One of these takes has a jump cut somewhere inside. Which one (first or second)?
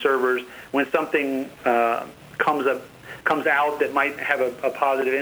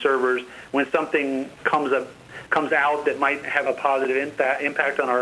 second